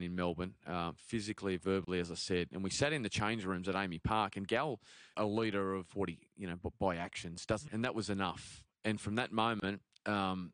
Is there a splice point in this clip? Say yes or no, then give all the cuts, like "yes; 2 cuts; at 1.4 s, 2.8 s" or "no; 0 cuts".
yes; 2 cuts; at 5.1 s, 7.7 s